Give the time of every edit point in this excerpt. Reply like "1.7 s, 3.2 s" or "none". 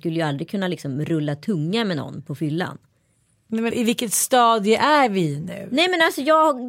3.7 s